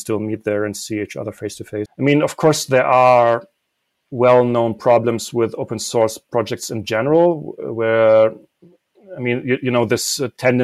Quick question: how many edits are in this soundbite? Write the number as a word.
one